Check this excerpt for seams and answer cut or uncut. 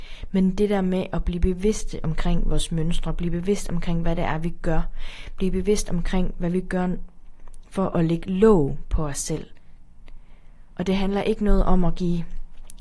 uncut